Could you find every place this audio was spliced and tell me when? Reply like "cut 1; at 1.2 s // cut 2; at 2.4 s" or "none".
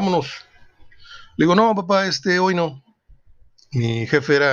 none